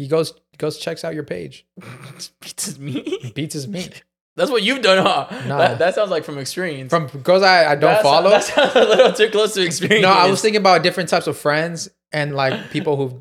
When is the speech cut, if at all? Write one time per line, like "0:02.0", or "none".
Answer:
0:12.3